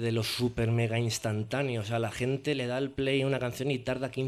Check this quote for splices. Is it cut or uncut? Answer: uncut